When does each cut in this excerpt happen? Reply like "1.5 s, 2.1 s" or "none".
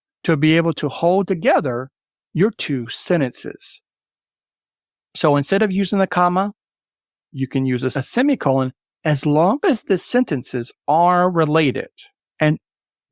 12.2 s